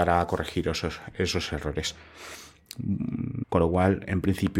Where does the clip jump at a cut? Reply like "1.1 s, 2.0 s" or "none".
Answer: 3.4 s